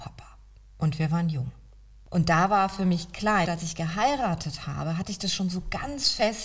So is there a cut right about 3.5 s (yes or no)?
yes